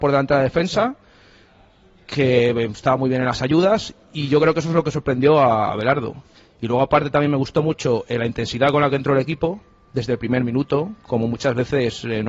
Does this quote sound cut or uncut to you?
uncut